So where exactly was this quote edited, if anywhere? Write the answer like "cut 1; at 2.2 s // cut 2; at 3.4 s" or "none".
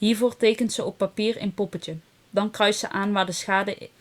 none